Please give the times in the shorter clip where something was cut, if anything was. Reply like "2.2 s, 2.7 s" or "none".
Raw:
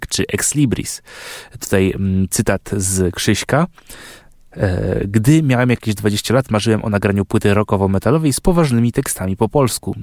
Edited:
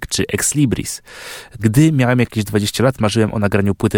1.6 s